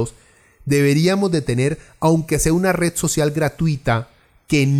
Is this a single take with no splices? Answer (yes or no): yes